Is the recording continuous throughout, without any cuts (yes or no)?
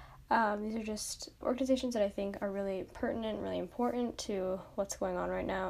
no